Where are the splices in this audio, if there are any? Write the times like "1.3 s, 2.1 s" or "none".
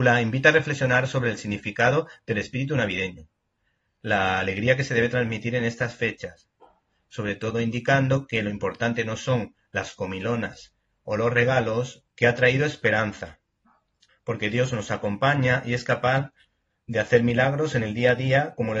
12.1 s, 14.1 s